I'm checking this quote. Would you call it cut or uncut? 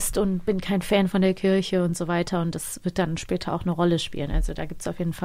uncut